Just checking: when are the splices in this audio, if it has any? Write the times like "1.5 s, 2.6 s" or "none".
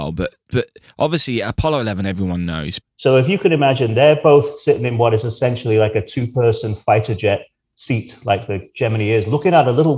2.8 s